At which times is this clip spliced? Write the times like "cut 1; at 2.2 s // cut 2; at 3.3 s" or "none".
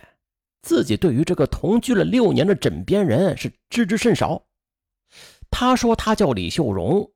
none